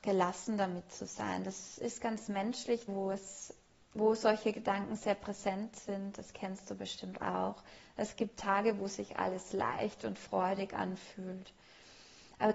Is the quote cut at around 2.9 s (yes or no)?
yes